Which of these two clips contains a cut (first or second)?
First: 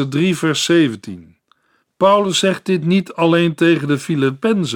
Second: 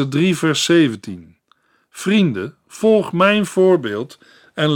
first